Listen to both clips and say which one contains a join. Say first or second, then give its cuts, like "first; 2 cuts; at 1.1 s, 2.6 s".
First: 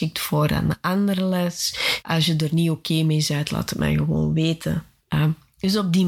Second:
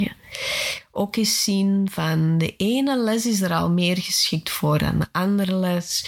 first; 1 cut; at 2.0 s